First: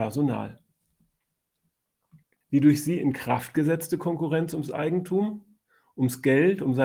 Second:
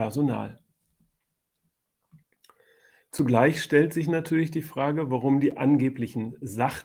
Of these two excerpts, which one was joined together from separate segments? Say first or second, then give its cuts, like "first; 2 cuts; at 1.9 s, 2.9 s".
first; 1 cut; at 2.4 s